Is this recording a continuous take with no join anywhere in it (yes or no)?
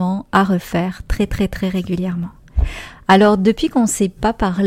yes